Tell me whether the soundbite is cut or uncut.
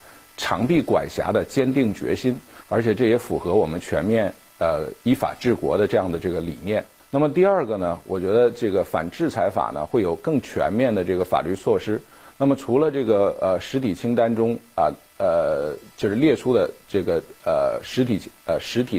uncut